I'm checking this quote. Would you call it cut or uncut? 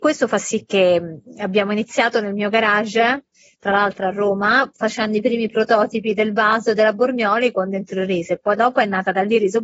uncut